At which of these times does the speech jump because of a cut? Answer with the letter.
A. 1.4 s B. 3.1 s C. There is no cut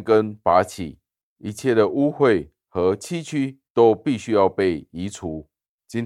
A